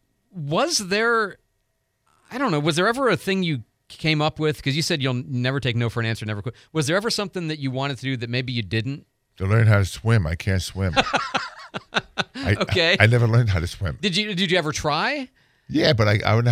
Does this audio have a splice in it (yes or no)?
no